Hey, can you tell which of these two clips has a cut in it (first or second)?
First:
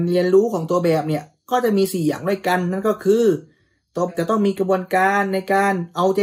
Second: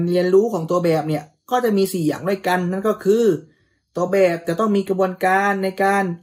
first